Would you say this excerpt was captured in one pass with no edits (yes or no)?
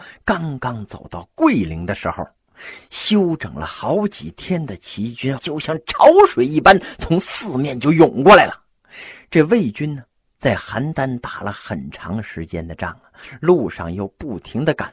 no